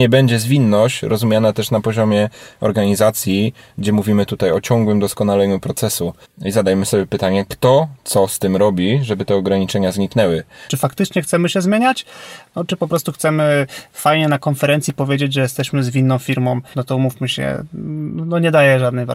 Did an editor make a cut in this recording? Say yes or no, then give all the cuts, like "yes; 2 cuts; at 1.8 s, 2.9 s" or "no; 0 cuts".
yes; 3 cuts; at 6.2 s, 10.7 s, 16.7 s